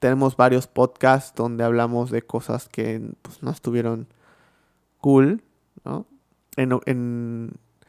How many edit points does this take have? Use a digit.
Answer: 1